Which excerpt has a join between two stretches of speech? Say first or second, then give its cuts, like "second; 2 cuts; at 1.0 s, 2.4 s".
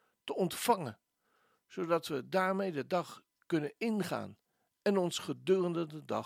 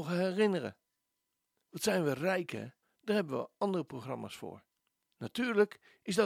second; 3 cuts; at 1.6 s, 2.8 s, 5.0 s